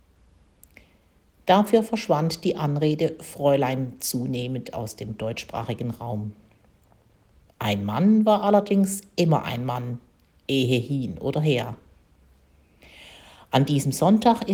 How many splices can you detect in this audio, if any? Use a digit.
1